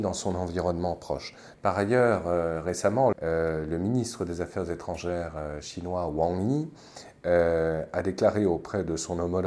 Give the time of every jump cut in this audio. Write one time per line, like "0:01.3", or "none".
0:01.5
0:03.1